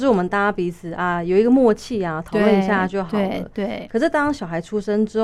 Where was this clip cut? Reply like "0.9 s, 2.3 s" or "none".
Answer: none